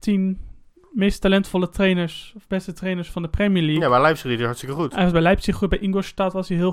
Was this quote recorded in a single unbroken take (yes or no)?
yes